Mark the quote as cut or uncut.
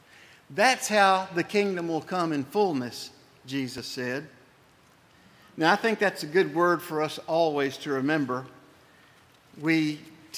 uncut